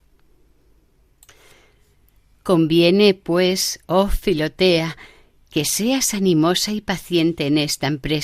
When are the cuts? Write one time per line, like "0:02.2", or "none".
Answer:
none